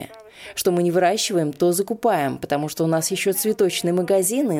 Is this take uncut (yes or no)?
yes